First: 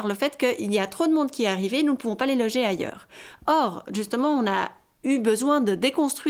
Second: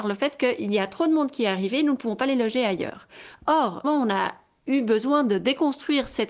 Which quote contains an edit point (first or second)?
second